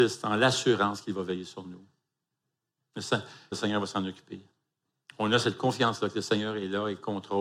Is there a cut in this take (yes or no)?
yes